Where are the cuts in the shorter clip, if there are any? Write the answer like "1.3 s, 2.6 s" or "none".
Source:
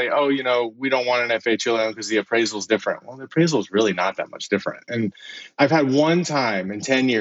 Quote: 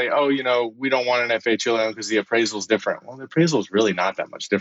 none